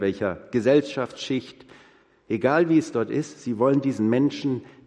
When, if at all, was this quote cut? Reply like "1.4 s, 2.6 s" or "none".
none